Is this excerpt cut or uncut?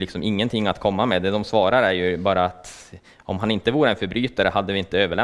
uncut